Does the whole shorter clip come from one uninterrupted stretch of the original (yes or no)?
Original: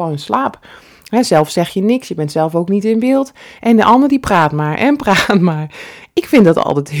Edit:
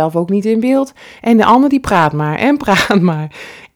yes